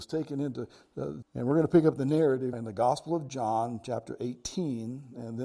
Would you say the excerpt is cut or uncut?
cut